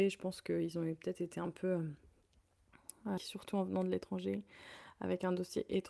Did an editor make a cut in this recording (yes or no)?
yes